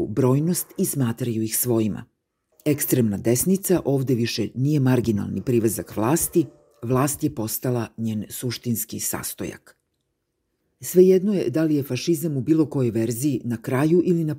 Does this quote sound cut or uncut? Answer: uncut